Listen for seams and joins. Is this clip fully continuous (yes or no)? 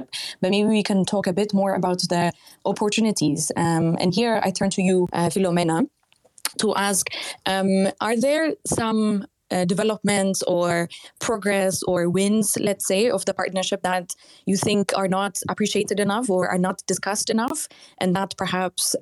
yes